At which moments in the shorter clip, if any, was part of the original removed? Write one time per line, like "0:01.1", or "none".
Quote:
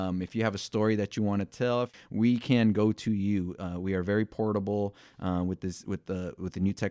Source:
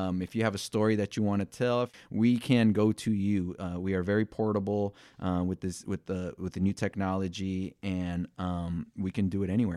none